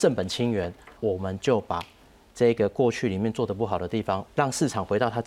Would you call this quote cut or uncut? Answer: cut